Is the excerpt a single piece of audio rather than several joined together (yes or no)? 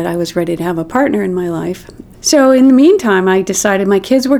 no